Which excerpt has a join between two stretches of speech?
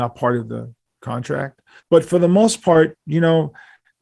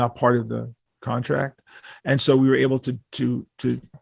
first; 1 cut; at 1.8 s

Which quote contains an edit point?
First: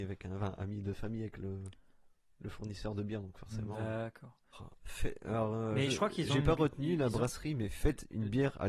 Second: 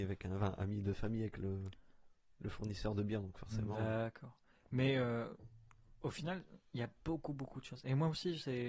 first; 1 cut; at 4.5 s

